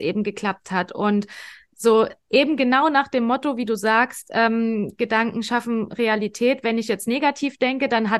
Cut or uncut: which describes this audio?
uncut